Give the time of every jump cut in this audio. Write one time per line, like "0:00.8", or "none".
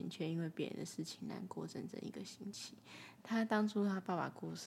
0:03.2